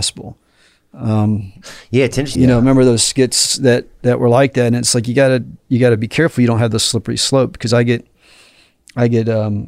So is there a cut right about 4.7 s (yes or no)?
no